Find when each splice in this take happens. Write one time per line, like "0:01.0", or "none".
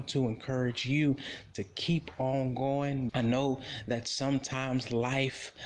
0:03.1